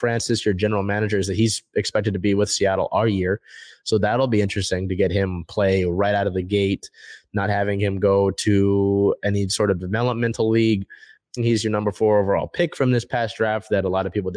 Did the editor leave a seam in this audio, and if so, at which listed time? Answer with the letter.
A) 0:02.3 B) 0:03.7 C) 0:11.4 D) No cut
C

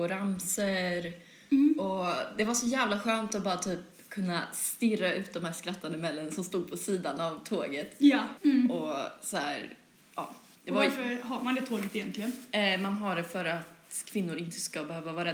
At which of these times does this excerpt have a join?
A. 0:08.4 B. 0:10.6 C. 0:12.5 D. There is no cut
A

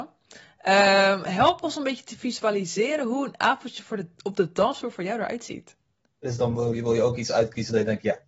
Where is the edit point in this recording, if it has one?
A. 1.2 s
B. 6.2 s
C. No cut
B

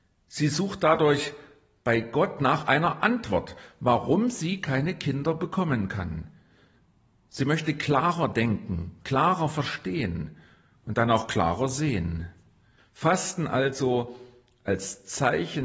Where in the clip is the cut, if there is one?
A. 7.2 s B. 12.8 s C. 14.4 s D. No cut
B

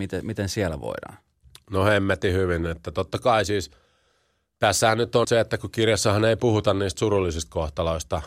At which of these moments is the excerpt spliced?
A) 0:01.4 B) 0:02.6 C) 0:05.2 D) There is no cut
C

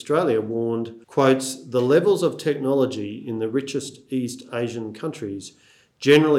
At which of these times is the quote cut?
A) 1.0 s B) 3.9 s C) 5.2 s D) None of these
A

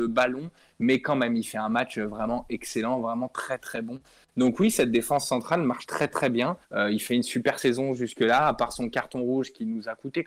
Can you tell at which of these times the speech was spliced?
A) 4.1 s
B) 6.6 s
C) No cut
B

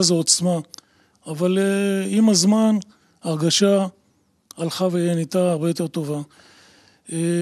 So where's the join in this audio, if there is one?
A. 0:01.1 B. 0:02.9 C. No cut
A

